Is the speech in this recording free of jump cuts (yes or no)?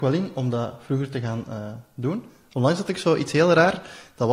yes